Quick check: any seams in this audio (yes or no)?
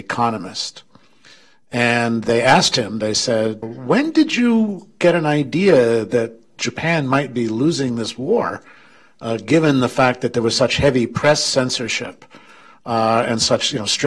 yes